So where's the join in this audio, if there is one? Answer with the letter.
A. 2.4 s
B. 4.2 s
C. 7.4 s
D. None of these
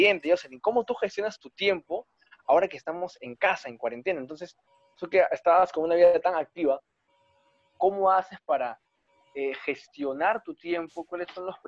D